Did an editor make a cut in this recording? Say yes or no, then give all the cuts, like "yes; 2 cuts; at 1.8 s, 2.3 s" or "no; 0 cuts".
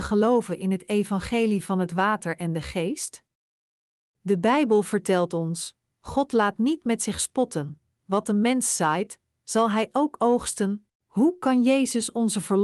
yes; 2 cuts; at 5.9 s, 10.9 s